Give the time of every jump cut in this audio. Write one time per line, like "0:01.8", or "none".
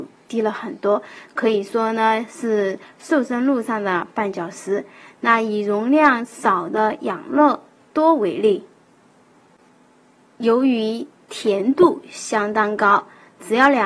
none